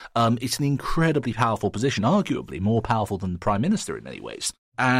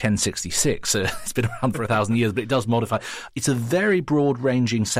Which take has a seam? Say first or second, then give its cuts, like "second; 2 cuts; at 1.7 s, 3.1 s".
second; 1 cut; at 3.3 s